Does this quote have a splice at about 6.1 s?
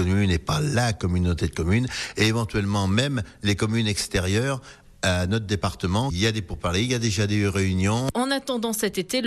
no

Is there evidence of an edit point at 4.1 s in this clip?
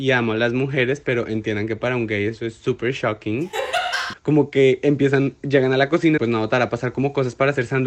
yes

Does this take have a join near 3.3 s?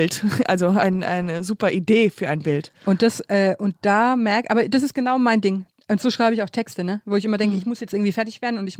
no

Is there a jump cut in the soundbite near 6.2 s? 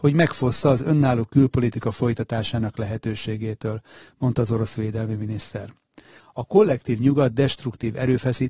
yes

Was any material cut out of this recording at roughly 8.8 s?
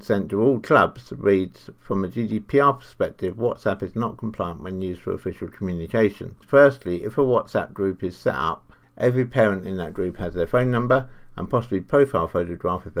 yes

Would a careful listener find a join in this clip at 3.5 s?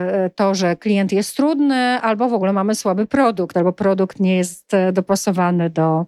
yes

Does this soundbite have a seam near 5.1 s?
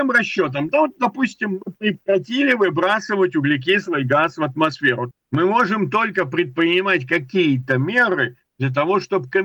yes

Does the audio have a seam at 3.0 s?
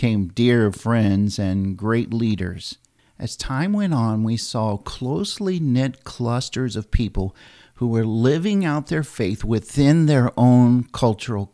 yes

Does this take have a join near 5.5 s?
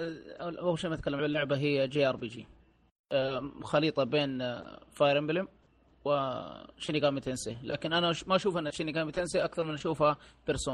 no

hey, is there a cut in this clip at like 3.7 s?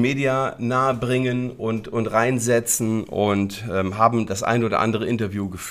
no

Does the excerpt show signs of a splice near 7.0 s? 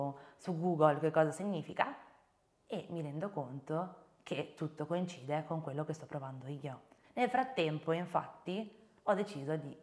yes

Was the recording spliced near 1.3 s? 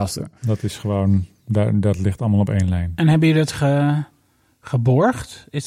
no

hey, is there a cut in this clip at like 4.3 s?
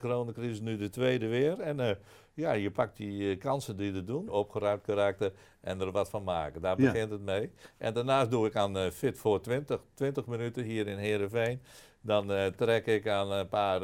yes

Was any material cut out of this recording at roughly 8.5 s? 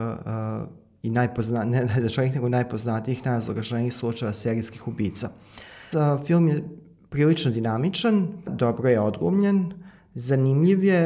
yes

